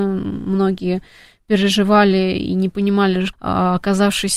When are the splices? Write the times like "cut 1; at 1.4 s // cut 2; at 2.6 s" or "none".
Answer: cut 1; at 3.3 s